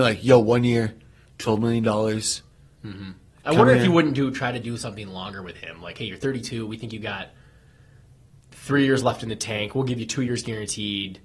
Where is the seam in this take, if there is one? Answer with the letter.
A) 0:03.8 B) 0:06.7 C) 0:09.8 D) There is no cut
D